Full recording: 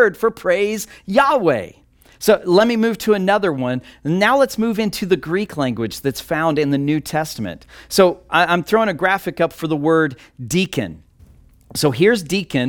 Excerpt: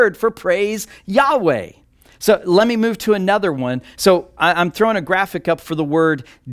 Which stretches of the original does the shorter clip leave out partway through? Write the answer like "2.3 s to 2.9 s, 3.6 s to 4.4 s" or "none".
3.9 s to 7.9 s